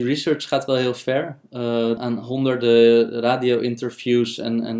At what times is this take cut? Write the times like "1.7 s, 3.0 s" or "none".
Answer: 2.0 s